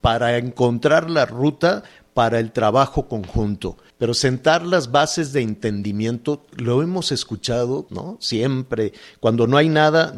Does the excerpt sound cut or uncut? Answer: cut